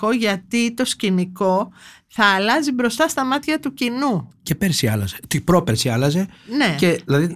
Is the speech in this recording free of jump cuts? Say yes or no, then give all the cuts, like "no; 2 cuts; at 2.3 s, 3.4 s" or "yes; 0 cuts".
yes; 0 cuts